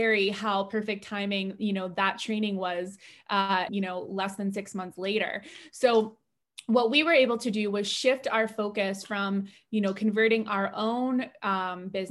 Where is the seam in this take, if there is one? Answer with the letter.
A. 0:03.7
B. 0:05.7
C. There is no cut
A